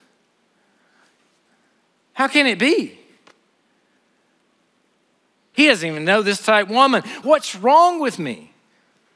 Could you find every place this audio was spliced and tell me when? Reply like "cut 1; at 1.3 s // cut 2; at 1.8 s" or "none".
cut 1; at 5.5 s // cut 2; at 7.2 s